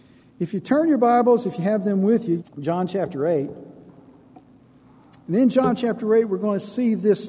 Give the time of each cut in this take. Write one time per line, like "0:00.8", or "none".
0:02.4